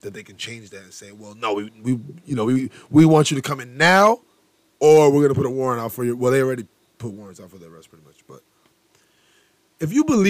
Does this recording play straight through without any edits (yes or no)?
yes